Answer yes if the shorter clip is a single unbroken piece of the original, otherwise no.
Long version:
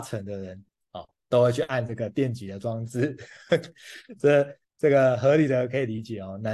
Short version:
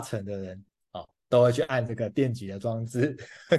yes